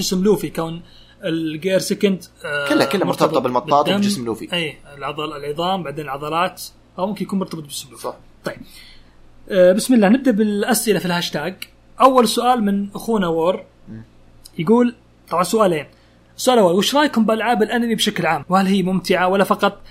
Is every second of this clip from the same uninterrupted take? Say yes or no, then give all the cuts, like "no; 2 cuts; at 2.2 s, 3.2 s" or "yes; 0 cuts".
no; 1 cut; at 18.4 s